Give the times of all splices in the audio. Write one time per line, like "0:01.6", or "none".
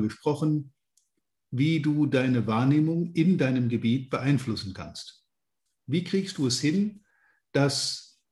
0:05.7